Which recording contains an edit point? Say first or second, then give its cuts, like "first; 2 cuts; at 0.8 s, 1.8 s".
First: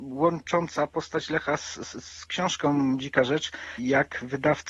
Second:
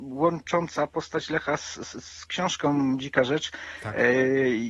first; 1 cut; at 3.8 s